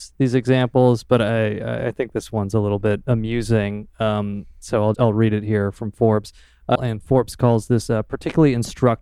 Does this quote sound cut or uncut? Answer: cut